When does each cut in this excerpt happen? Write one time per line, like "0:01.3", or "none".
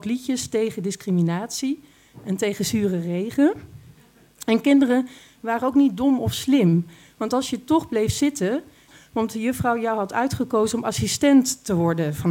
0:08.9